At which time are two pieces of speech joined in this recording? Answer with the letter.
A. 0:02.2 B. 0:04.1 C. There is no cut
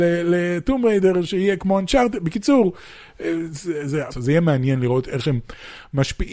B